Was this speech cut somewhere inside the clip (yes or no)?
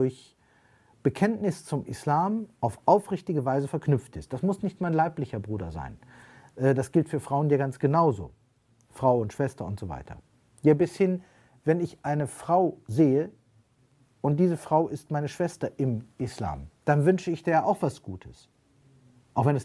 yes